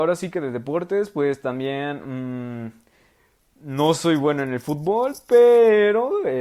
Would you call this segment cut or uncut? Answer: uncut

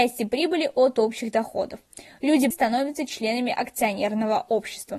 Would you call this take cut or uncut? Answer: cut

